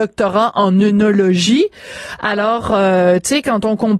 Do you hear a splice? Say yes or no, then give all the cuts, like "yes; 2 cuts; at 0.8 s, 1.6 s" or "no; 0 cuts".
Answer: no; 0 cuts